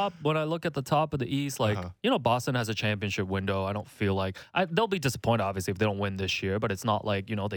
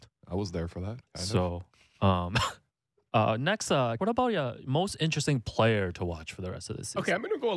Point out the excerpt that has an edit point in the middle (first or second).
second